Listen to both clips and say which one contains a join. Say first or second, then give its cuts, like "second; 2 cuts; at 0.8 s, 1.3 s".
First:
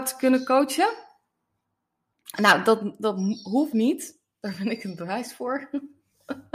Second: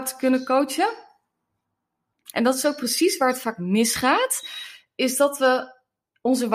second; 1 cut; at 2.3 s